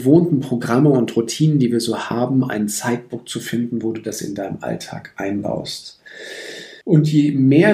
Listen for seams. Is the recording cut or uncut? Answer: cut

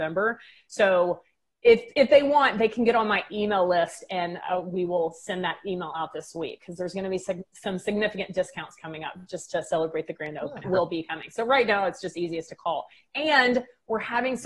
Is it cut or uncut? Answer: cut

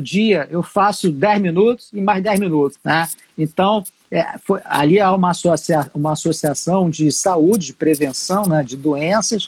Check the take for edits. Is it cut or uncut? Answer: cut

